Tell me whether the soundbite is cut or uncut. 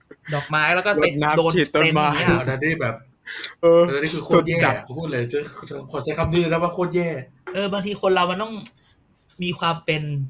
cut